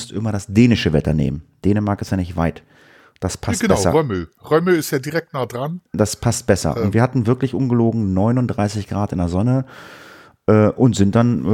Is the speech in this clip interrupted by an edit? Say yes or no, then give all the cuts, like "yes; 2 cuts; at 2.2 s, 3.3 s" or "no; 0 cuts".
no; 0 cuts